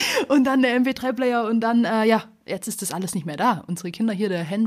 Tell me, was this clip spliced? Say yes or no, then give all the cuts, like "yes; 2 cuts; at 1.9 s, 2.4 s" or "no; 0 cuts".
no; 0 cuts